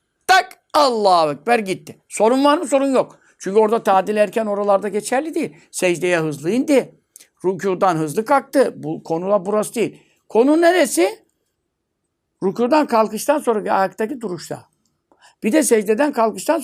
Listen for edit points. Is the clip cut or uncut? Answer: uncut